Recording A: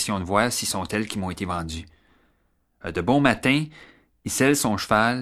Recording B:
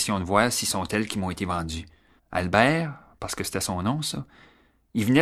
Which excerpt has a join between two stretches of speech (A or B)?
B